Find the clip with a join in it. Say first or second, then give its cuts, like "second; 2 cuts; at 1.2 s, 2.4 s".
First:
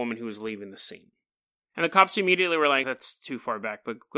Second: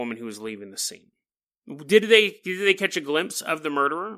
first; 2 cuts; at 1.6 s, 2.8 s